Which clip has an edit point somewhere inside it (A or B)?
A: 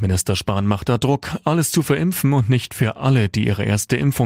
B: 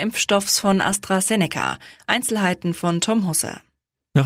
B